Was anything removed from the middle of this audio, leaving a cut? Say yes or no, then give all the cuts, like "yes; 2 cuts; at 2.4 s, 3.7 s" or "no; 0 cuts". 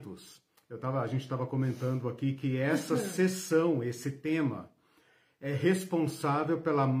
no; 0 cuts